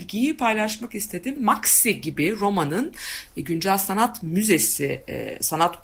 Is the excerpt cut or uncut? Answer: cut